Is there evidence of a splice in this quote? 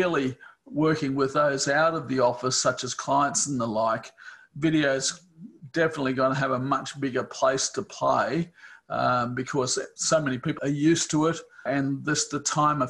yes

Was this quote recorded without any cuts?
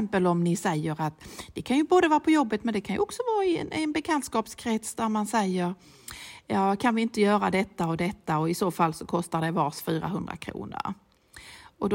yes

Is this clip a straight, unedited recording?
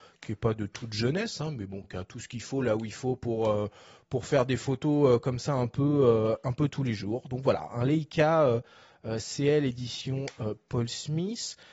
yes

